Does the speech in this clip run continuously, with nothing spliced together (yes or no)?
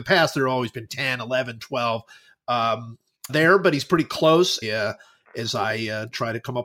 no